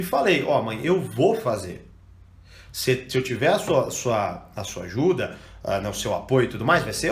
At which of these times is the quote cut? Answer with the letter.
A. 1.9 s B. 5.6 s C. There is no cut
C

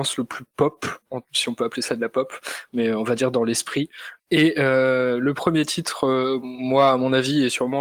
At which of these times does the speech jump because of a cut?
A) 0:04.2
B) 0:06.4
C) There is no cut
A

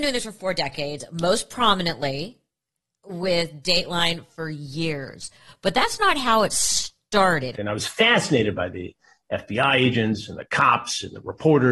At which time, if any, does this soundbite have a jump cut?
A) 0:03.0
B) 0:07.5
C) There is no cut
B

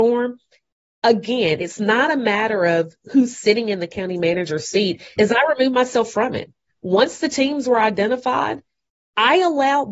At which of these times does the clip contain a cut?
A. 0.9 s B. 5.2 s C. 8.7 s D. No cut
B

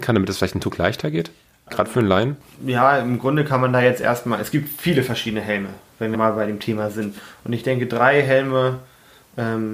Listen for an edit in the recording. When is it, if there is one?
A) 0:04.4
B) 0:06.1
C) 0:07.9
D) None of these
B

